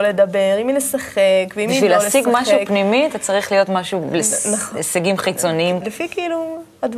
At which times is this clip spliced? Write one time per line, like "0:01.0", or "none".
0:05.8